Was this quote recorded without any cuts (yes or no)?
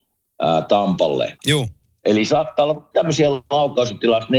no